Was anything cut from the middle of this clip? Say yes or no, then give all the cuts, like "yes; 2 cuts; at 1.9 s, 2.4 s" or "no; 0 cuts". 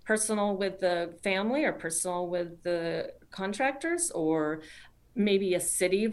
no; 0 cuts